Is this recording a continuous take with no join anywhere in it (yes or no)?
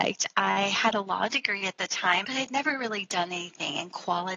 no